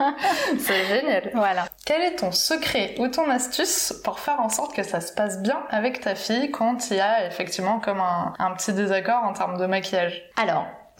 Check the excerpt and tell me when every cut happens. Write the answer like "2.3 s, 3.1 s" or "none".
none